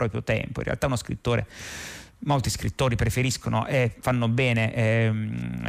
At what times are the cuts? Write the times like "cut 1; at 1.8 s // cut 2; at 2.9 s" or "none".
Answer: cut 1; at 4.0 s